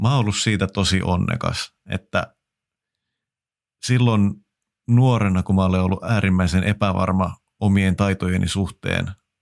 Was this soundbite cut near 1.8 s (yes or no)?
no